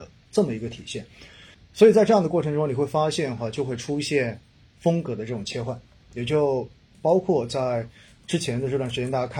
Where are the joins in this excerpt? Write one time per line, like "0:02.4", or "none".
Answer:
0:01.5

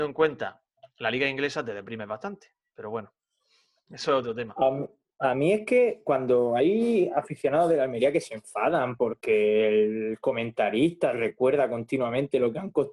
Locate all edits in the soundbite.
none

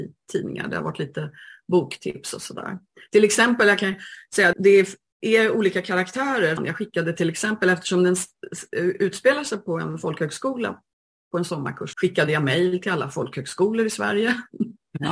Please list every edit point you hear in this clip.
0:04.5
0:06.6
0:11.9

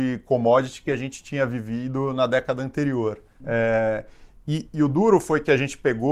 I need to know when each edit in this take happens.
0:03.4

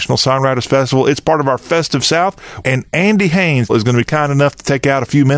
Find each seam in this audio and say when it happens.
0:02.6
0:03.7

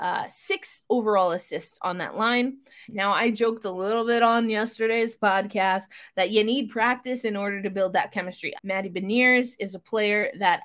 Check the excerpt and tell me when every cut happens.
0:02.8
0:08.6

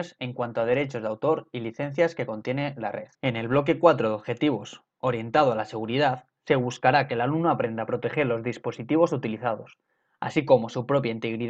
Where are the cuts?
0:03.1

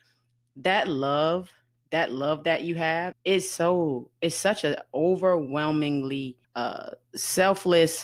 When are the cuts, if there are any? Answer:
0:03.1
0:06.4

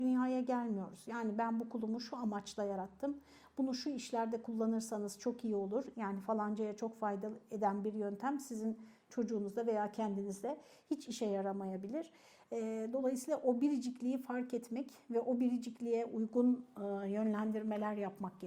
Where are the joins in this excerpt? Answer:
0:05.9

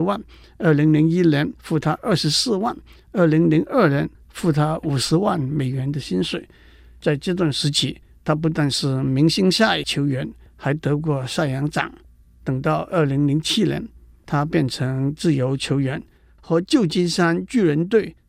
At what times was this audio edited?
none

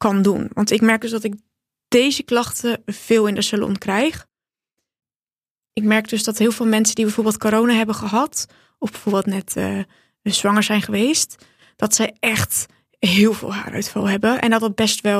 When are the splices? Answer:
none

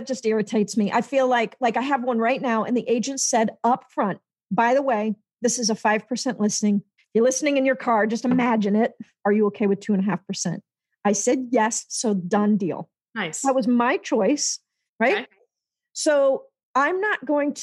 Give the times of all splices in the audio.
0:07.0
0:09.2
0:14.9

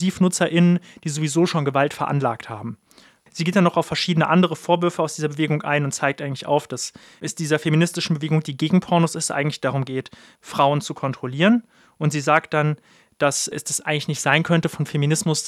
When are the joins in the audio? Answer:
none

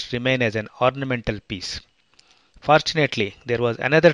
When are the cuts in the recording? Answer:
0:02.5

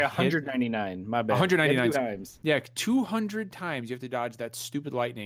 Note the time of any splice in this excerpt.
0:01.9

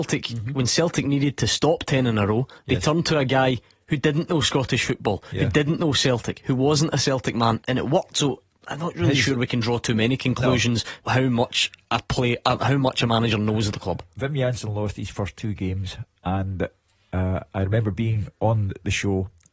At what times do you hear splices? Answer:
0:07.6
0:11.0

